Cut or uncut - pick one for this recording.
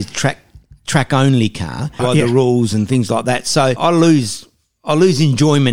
cut